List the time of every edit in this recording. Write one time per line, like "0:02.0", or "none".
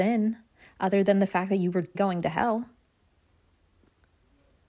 0:01.9